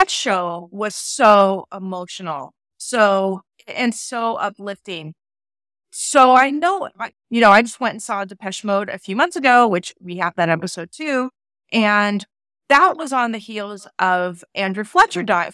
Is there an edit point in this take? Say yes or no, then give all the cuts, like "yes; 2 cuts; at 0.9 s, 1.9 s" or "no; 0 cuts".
yes; 1 cut; at 7.1 s